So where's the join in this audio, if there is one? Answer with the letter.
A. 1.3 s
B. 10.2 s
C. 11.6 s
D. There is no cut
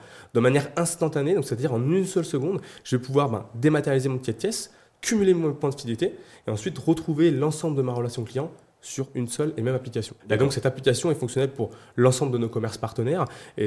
B